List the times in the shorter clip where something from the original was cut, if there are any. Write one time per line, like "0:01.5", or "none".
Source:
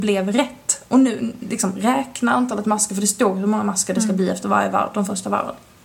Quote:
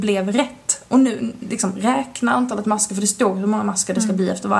none